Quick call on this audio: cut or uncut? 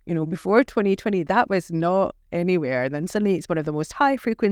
uncut